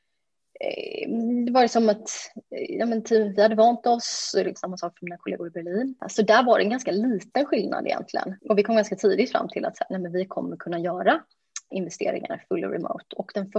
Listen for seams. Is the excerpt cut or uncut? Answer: cut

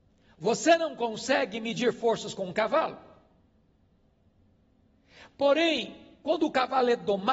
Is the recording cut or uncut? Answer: uncut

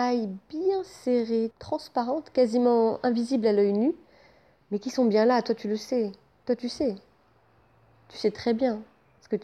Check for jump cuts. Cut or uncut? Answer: cut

